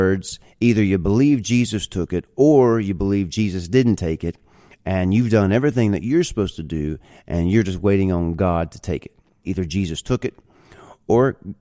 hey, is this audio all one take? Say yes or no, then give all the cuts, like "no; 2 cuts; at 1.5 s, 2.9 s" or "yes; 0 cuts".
no; 1 cut; at 9.4 s